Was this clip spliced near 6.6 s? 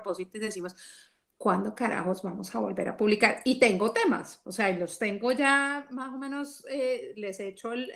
no; 0 cuts

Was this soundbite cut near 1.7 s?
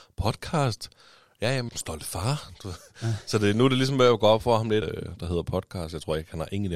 yes; 2 cuts; at 1.7 s, 4.8 s

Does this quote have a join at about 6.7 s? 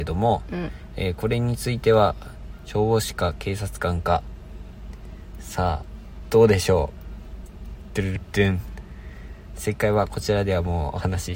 no; 1 cut; at 8.2 s

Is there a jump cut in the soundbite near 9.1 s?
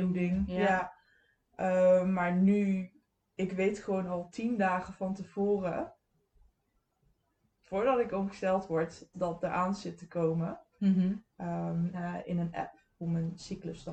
yes; 3 cuts; at 9.1 s, 10.8 s, 11.9 s

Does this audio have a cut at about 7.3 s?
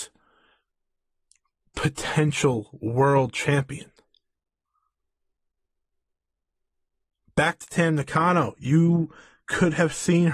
no; 0 cuts

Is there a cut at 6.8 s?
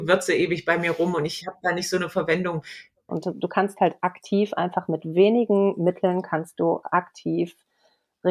yes; 2 cuts; at 3.1 s, 6.8 s

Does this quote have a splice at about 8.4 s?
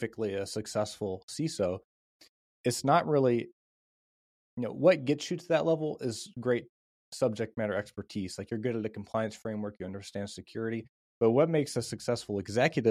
no; 0 cuts

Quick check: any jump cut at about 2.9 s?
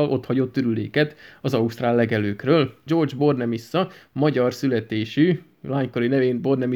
yes; 1 cut; at 2.9 s

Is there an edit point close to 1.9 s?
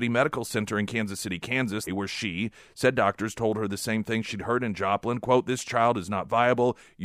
yes; 1 cut; at 1.9 s

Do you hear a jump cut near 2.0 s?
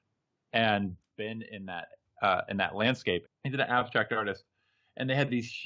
no; 1 cut; at 3.3 s

